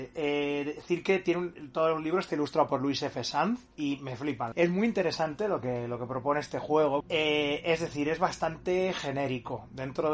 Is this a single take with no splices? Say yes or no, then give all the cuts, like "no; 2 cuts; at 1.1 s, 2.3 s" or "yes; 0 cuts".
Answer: no; 2 cuts; at 4.5 s, 7.0 s